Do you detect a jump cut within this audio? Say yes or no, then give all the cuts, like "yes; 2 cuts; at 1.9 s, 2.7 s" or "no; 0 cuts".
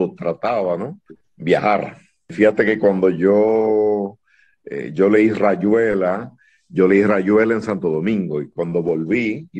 yes; 1 cut; at 1.1 s